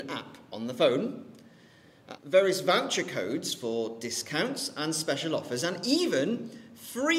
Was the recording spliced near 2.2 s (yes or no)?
yes